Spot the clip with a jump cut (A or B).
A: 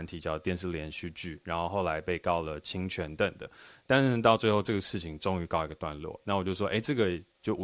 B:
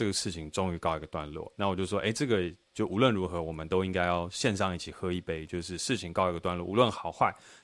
A